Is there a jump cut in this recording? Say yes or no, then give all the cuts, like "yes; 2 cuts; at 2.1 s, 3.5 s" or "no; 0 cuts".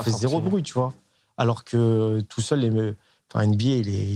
no; 0 cuts